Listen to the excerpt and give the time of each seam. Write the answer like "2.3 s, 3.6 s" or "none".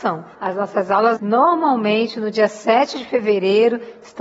1.2 s